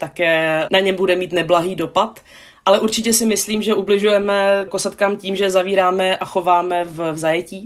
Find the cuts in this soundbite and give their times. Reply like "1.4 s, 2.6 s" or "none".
4.7 s